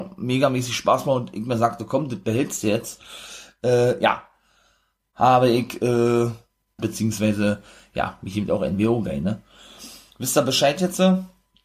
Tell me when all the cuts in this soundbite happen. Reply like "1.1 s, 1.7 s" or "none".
6.8 s